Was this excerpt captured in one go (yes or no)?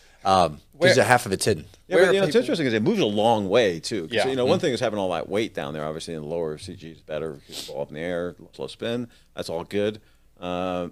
no